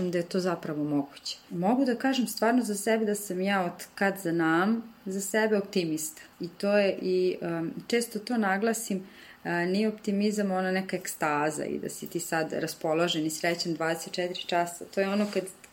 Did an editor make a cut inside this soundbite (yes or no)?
yes